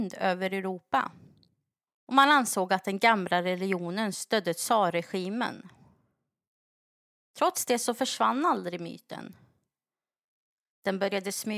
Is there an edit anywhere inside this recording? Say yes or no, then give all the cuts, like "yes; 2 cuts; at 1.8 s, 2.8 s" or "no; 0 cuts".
yes; 1 cut; at 1.9 s